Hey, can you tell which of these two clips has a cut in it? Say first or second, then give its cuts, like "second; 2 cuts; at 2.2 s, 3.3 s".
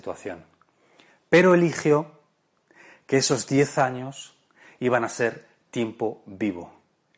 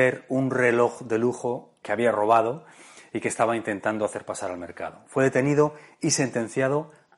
second; 1 cut; at 1.8 s